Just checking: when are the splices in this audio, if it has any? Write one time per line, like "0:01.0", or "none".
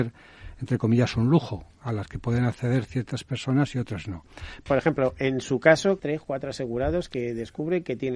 0:04.7
0:06.0